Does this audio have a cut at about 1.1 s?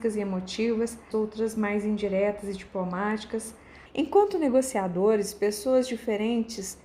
yes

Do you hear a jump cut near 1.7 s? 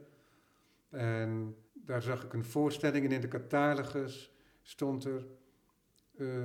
yes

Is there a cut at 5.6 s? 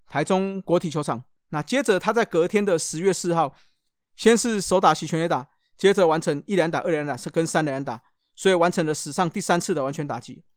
no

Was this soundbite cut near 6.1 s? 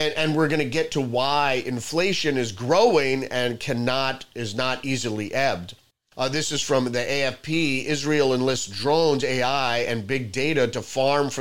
yes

